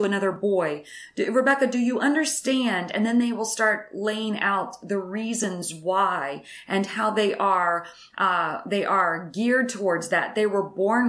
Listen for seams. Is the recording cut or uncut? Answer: uncut